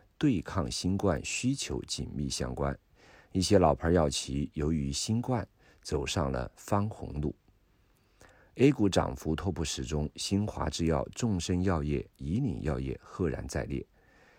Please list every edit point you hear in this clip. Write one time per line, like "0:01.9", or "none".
none